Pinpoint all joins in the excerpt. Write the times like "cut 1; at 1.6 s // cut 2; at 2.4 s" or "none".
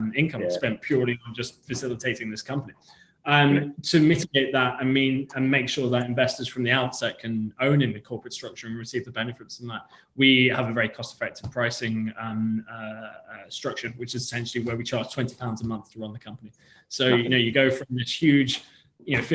none